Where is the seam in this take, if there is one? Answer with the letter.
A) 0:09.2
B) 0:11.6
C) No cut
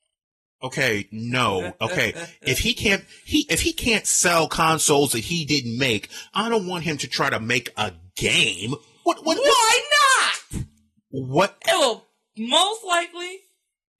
B